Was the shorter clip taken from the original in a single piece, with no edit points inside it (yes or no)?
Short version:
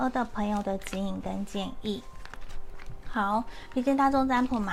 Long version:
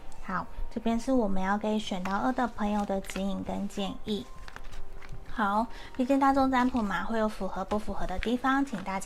yes